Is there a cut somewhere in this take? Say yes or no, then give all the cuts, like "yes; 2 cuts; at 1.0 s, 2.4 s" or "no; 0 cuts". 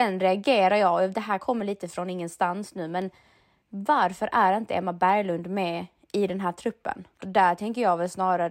yes; 1 cut; at 7.2 s